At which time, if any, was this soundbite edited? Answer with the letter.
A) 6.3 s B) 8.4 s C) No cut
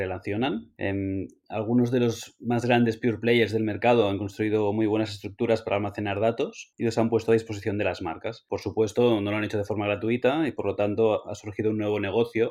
C